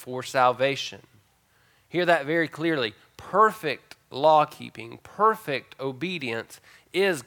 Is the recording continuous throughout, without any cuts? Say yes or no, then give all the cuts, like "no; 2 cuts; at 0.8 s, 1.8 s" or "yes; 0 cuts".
yes; 0 cuts